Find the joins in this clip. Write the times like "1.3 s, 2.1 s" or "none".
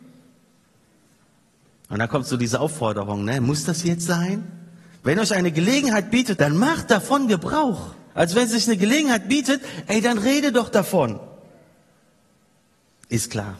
6.4 s, 8.1 s

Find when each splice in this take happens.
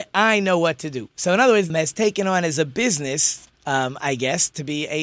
1.7 s

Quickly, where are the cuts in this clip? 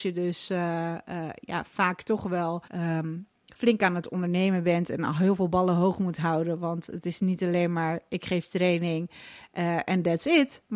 2.7 s

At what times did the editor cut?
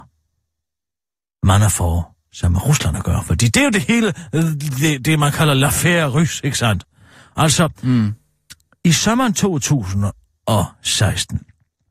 none

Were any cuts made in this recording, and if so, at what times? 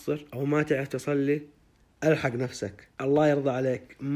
2.9 s

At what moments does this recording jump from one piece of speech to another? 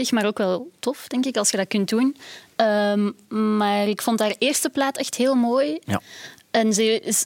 5.8 s

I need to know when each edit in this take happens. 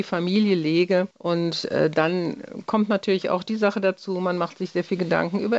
1.1 s

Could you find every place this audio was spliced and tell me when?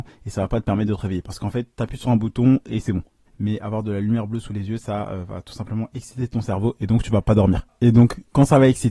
3.3 s

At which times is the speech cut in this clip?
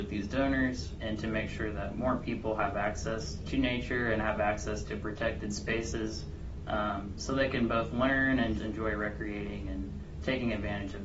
8.6 s

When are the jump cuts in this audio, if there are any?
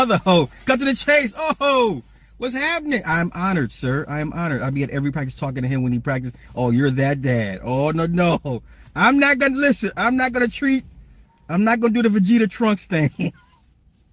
none

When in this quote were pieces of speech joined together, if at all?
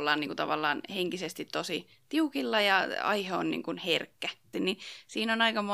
4.5 s

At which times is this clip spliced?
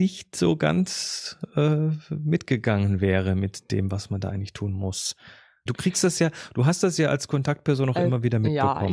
5.7 s

